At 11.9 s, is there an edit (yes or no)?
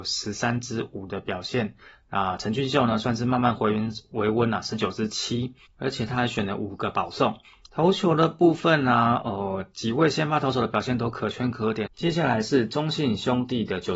yes